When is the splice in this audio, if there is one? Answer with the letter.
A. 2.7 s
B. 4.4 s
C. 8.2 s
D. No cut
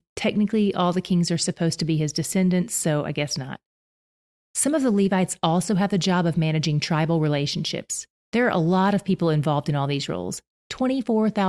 C